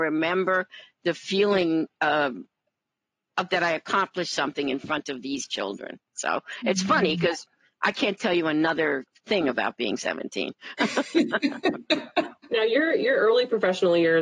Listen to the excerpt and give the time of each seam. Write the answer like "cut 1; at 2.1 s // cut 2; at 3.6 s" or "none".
none